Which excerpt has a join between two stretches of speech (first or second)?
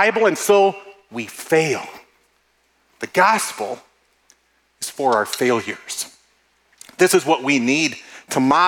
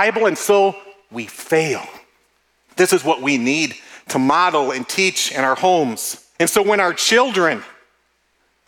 second